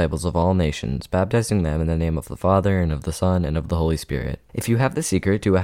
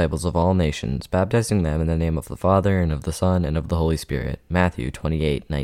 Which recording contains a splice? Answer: first; 1 cut; at 4.4 s

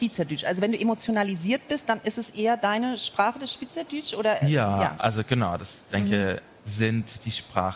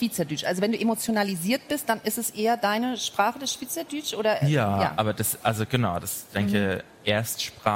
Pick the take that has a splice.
first; 2 cuts; at 5.0 s, 6.6 s

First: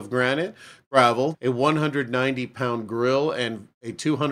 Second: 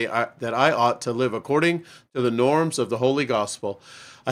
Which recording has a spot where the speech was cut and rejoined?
first; 1 cut; at 1.3 s

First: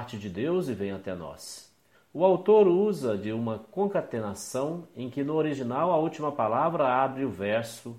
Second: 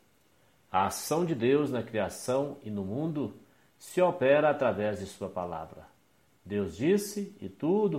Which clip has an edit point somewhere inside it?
first; 1 cut; at 1.9 s

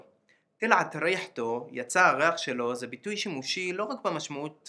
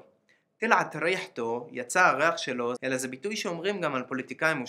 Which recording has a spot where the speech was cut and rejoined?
second; 1 cut; at 2.8 s

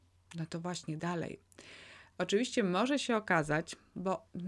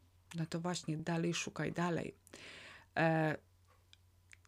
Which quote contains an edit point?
first; 2 cuts; at 1.0 s, 2.1 s

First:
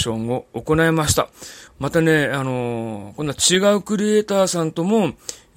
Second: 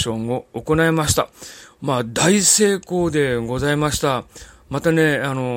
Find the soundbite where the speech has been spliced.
first; 1 cut; at 1.7 s

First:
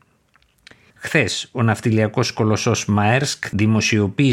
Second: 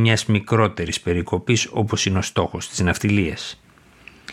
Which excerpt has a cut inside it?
first; 1 cut; at 0.9 s

